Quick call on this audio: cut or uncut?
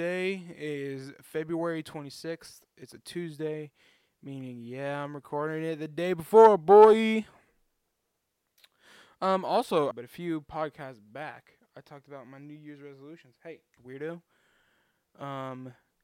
cut